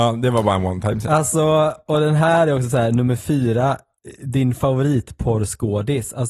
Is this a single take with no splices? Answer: yes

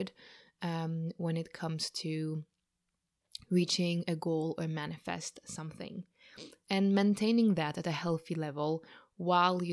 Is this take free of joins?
no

